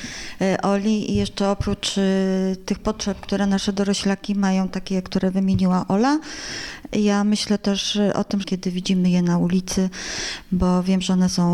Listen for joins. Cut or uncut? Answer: cut